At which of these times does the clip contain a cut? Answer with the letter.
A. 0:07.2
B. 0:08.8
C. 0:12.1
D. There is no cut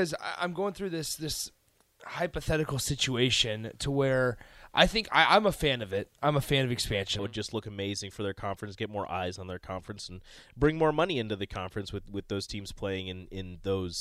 A